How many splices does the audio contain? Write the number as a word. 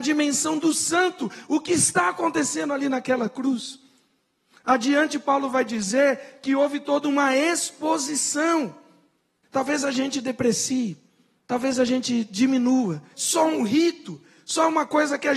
two